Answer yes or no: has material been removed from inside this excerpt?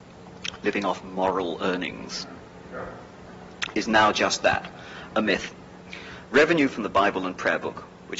no